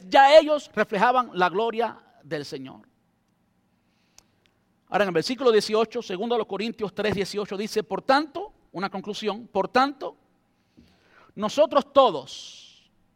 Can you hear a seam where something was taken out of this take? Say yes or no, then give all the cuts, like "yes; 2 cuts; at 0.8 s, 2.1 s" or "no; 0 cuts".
no; 0 cuts